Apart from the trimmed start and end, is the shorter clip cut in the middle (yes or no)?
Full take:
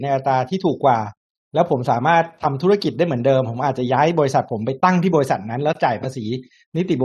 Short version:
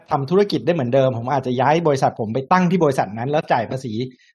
no